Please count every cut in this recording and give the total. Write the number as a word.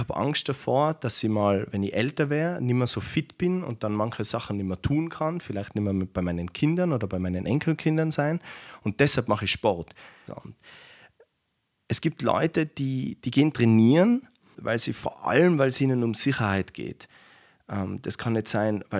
two